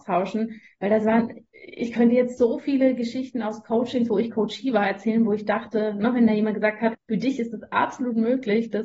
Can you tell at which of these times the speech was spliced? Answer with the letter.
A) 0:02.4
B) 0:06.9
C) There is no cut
B